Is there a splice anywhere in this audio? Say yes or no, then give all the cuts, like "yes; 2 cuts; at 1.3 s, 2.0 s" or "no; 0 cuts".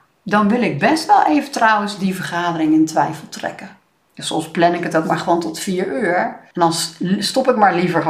yes; 2 cuts; at 4.1 s, 6.5 s